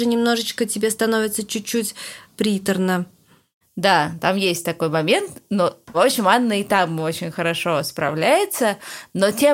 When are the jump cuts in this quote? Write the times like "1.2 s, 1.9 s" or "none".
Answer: none